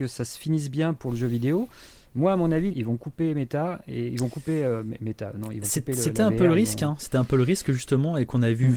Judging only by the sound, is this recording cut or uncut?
cut